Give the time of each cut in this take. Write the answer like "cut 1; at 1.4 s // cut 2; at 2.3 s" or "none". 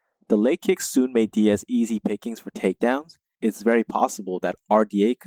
cut 1; at 3.3 s